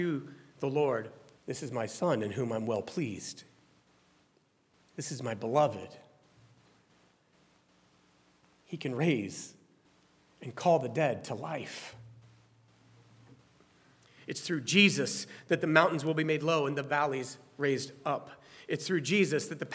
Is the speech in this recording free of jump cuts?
no; 1 cut; at 1.4 s

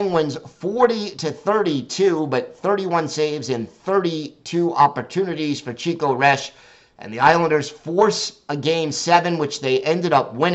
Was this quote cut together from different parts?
no; 0 cuts

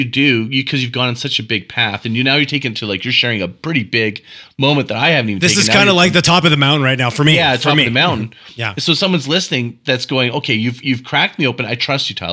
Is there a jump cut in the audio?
no; 0 cuts

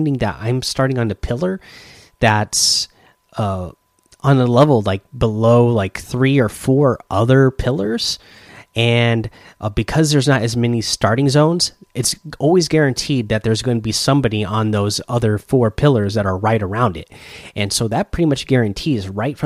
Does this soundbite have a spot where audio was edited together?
no; 0 cuts

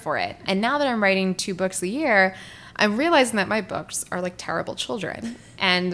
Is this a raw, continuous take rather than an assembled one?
yes; 0 cuts

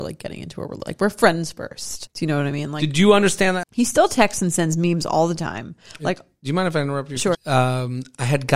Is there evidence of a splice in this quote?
yes; 3 cuts; at 2.1 s, 3.6 s, 7.3 s

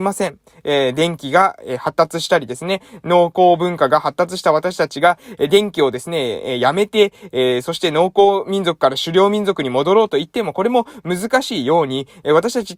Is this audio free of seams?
yes; 0 cuts

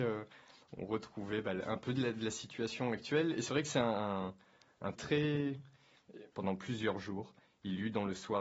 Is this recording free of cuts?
no; 2 cuts; at 5.0 s, 6.3 s

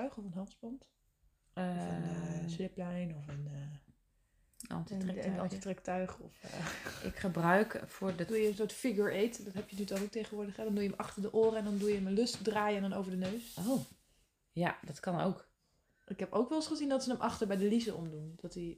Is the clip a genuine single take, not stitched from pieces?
yes; 0 cuts

